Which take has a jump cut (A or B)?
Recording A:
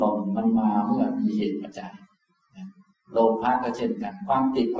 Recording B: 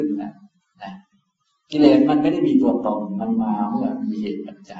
A